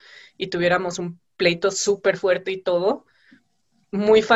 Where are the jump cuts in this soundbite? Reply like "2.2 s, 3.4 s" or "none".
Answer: none